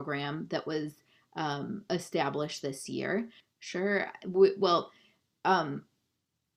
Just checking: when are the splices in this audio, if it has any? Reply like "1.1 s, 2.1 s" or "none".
3.4 s